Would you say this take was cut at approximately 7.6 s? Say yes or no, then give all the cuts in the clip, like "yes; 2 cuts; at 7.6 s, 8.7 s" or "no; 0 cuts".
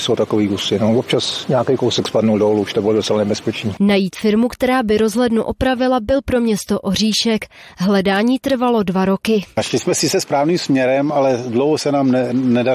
no; 0 cuts